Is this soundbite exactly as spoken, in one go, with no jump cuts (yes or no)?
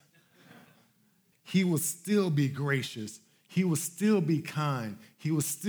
no